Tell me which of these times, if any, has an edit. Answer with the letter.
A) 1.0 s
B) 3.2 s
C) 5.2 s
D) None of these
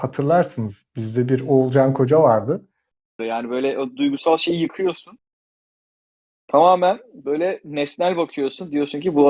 B